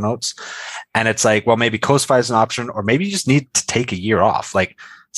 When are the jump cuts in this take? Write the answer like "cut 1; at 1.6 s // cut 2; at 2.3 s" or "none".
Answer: none